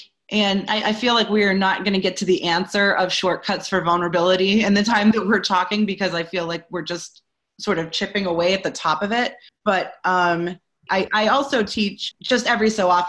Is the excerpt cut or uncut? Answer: cut